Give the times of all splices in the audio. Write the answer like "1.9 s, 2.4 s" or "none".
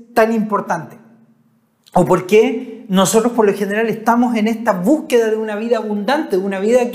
none